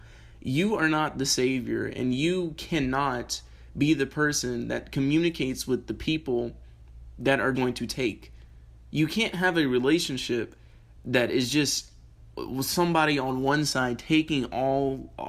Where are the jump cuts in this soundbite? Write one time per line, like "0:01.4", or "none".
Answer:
0:07.5